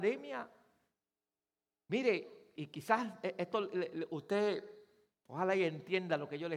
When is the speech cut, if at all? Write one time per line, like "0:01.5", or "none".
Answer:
0:02.6